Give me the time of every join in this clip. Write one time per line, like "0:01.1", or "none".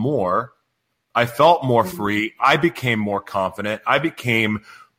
none